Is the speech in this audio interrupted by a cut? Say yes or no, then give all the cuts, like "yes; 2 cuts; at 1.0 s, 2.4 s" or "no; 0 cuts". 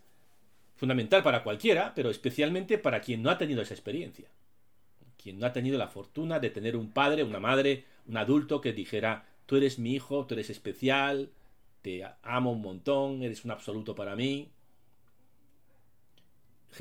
no; 0 cuts